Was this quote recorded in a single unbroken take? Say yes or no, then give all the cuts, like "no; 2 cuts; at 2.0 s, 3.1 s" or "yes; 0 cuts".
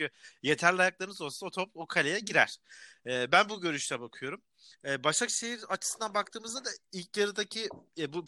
yes; 0 cuts